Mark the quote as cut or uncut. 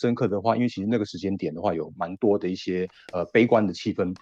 uncut